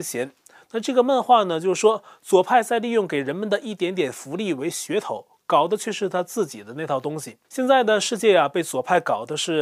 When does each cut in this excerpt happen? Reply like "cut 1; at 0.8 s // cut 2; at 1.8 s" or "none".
cut 1; at 7.4 s